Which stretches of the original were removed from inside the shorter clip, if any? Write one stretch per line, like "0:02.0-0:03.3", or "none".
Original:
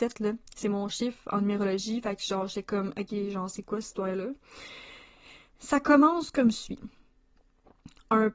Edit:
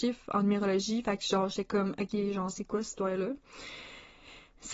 none